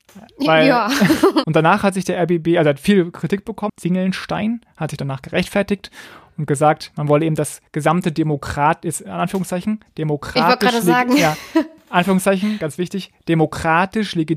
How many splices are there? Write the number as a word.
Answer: two